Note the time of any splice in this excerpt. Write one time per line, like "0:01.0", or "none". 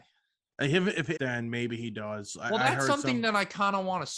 0:01.2